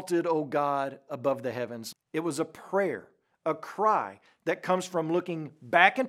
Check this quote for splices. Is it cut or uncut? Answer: cut